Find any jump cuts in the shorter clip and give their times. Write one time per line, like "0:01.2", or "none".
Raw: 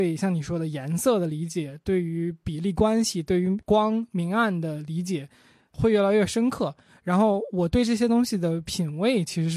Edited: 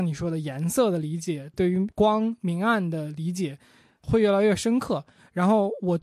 0:01.5